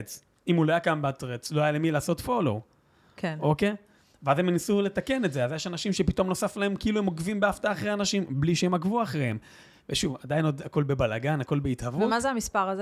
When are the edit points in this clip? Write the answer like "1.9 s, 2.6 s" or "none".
none

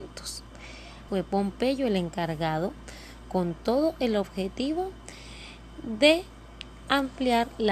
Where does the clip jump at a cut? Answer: 1.1 s

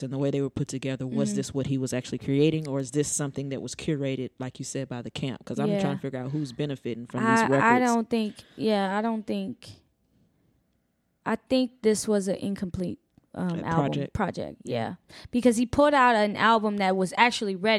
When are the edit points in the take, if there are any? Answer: 13.3 s

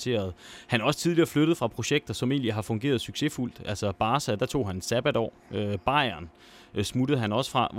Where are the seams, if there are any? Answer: 4.4 s

